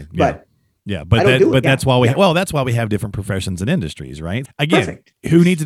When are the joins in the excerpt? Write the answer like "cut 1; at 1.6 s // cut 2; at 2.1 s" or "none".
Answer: cut 1; at 1.6 s // cut 2; at 4.4 s